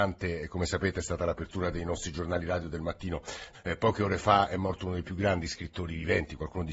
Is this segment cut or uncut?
cut